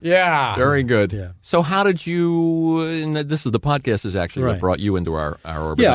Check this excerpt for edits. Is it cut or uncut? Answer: uncut